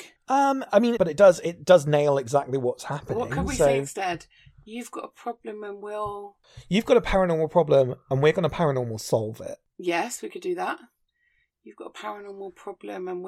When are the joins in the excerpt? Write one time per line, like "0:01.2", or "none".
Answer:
0:01.0